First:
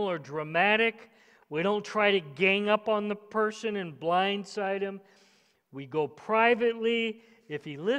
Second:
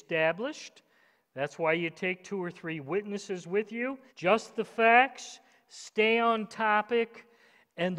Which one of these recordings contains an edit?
second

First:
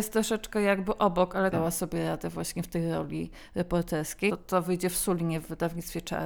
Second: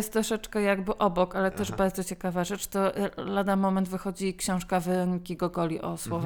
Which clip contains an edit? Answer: first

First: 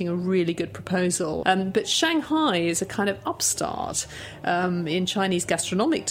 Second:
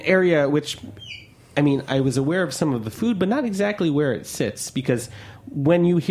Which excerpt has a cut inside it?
first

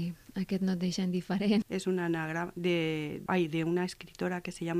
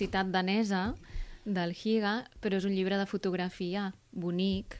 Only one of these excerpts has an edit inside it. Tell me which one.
first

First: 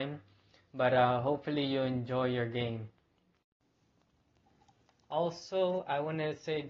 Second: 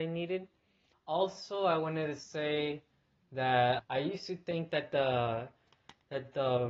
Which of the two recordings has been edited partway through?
second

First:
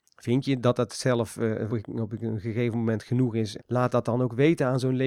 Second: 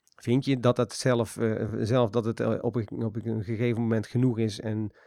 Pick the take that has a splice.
first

